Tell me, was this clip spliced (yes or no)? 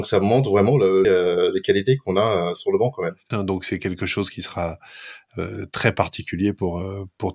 yes